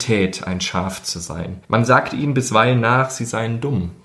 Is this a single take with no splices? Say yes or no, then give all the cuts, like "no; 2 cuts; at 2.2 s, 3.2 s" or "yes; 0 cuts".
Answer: no; 1 cut; at 1.6 s